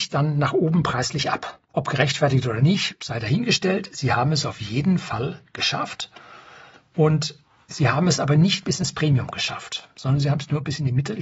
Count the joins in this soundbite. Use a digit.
1